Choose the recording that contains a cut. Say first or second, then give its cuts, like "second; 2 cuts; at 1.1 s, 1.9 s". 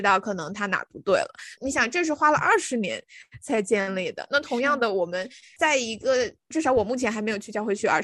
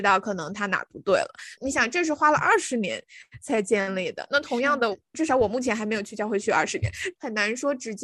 second; 1 cut; at 4.9 s